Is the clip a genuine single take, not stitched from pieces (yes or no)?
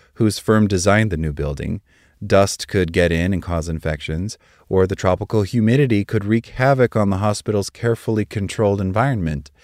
yes